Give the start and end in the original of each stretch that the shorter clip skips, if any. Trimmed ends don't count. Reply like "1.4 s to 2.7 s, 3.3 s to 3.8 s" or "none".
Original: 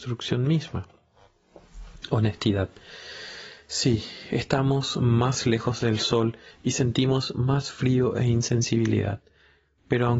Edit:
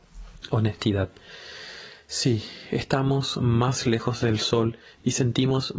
none

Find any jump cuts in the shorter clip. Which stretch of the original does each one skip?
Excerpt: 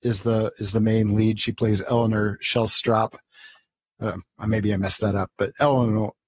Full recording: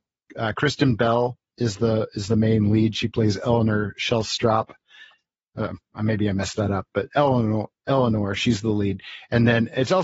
none

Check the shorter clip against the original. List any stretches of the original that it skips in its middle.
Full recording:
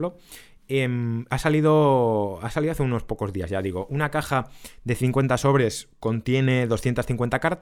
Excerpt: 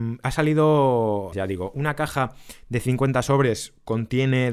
2.4 s to 3.5 s

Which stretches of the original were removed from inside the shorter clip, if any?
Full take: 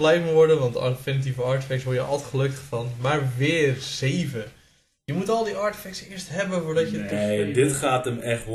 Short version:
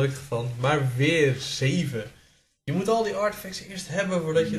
none

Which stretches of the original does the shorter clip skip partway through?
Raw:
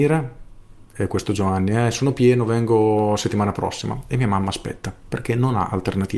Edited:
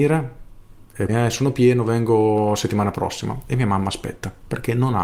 1.1 s to 1.7 s

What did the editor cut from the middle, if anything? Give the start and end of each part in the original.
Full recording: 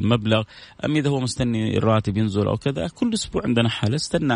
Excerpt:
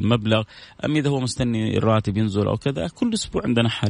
none

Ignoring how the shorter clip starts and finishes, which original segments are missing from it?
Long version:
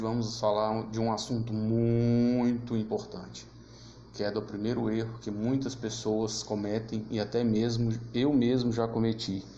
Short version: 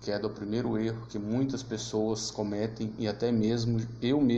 none

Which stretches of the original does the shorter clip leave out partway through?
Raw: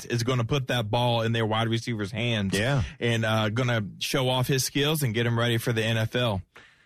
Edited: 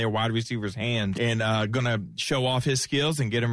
2.5 s to 3.0 s

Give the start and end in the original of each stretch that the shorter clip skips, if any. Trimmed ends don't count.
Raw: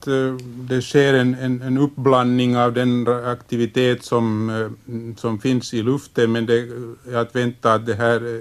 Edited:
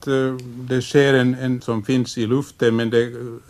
1.6 s to 5.2 s

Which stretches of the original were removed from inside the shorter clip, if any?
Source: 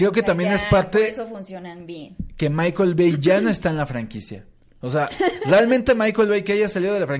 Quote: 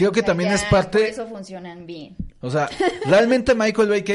2.3 s to 4.7 s

